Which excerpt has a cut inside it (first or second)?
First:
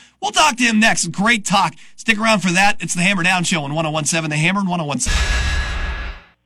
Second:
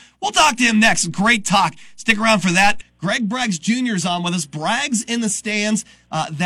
second